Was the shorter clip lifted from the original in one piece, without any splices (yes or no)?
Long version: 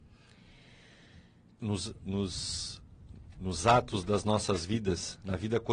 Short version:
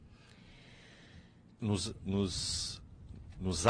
yes